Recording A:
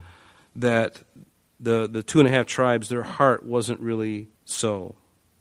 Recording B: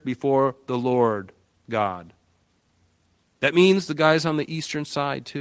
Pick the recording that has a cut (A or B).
A